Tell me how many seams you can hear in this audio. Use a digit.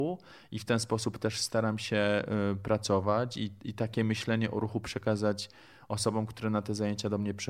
0